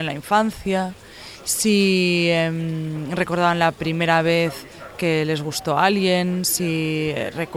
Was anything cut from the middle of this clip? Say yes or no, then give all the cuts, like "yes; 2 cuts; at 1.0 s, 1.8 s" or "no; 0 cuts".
no; 0 cuts